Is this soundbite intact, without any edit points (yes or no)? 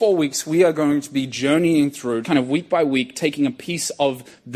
no